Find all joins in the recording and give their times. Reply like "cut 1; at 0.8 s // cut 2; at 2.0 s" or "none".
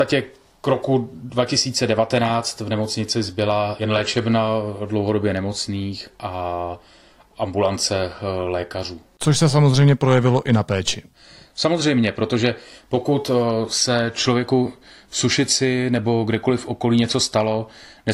none